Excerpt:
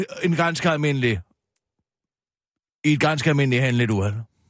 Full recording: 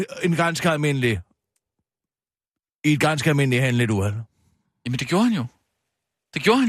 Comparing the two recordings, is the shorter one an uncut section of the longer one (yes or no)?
yes